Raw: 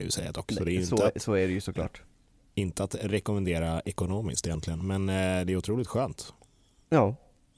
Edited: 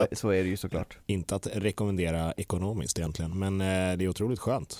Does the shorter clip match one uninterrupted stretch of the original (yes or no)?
no